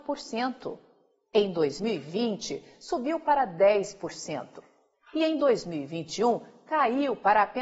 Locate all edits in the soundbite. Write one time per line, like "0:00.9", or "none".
none